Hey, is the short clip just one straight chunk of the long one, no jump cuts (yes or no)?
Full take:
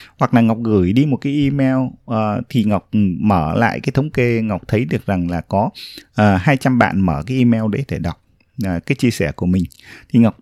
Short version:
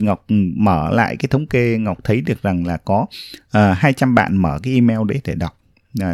yes